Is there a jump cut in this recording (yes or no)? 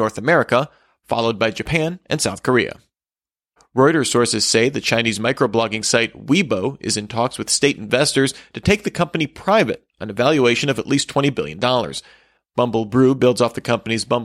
yes